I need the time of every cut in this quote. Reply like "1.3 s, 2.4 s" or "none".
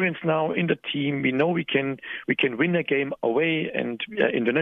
none